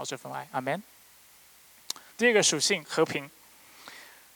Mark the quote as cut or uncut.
cut